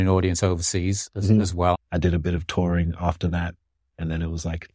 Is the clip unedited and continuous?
no; 1 cut; at 1.7 s

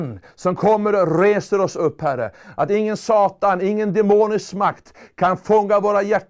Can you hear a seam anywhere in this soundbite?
no; 0 cuts

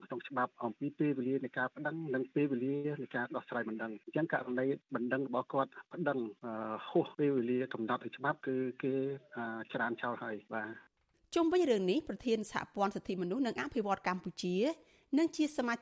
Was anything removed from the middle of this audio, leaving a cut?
no; 0 cuts

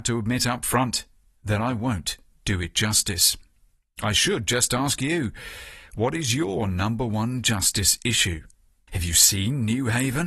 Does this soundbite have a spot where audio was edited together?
yes; 1 cut; at 8.9 s

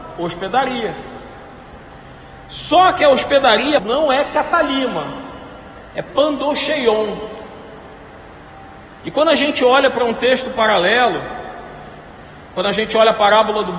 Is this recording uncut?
no; 3 cuts; at 3.8 s, 5.9 s, 9.0 s

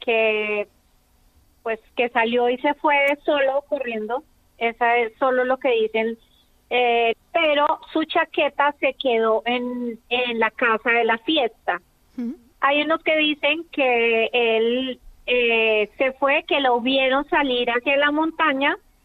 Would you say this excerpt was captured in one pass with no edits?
no; 1 cut; at 7.1 s

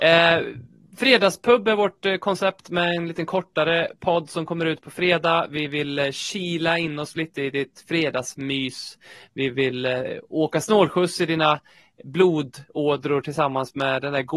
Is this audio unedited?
yes; 0 cuts

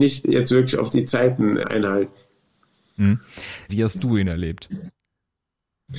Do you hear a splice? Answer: yes; 2 cuts; at 1.6 s, 3.7 s

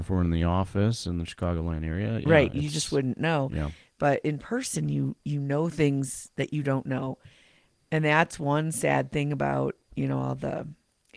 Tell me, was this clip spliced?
no; 0 cuts

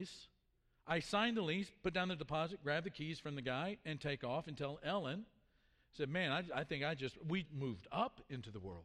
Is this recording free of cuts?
no; 1 cut; at 7.4 s

